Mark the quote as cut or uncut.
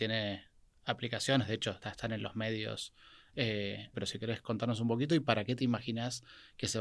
cut